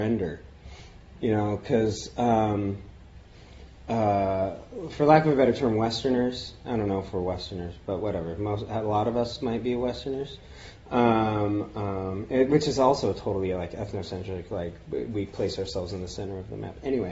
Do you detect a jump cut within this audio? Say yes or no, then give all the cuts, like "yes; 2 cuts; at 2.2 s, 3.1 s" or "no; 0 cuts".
no; 0 cuts